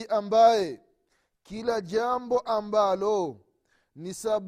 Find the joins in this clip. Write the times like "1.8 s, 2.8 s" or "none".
none